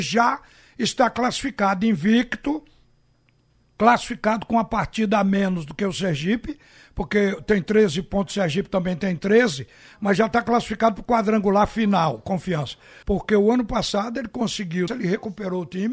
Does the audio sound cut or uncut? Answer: cut